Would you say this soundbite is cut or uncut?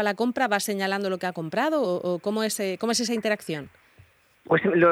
uncut